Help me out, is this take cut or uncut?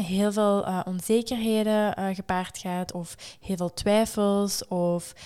uncut